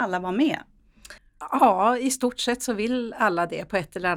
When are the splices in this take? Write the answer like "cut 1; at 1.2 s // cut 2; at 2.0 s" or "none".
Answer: cut 1; at 1.2 s